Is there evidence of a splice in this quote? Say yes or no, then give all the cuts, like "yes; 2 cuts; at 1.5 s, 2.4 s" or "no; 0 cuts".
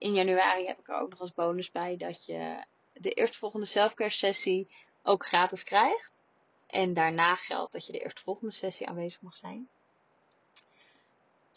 yes; 1 cut; at 6.6 s